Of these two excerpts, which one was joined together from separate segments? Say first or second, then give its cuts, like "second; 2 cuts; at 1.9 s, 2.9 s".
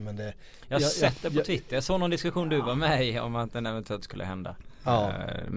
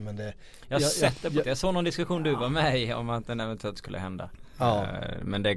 second; 1 cut; at 1.4 s